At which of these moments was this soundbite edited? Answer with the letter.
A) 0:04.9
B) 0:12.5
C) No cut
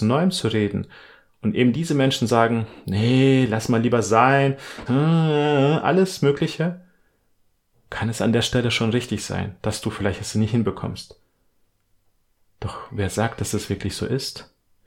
A